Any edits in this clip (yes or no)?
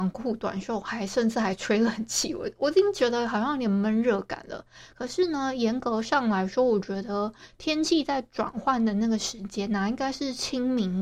no